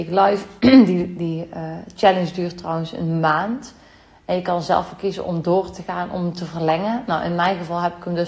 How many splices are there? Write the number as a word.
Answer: zero